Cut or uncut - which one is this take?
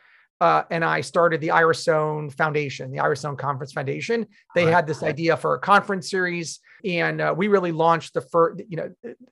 cut